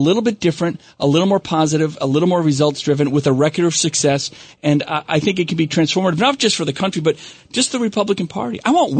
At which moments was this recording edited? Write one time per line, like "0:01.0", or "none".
none